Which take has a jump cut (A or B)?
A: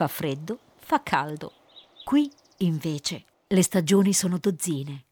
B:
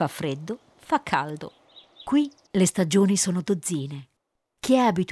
B